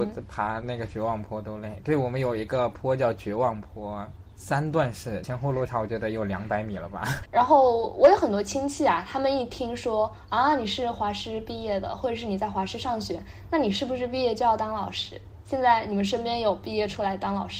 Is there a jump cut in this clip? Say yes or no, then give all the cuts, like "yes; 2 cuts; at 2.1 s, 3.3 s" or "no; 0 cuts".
yes; 1 cut; at 7.3 s